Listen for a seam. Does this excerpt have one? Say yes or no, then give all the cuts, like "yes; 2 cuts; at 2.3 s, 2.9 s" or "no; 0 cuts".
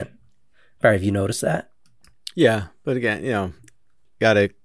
no; 0 cuts